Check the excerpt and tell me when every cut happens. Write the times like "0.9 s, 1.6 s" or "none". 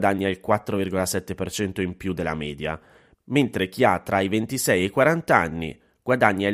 none